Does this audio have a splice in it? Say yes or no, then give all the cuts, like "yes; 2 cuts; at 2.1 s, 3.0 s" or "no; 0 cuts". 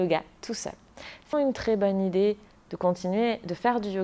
yes; 1 cut; at 1.3 s